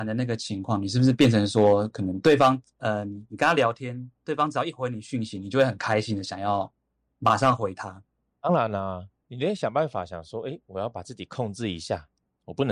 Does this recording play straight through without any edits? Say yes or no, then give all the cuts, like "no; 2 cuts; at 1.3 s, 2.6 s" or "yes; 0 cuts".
yes; 0 cuts